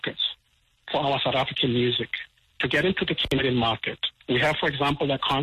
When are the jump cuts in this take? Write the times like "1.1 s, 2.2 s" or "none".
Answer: 4.2 s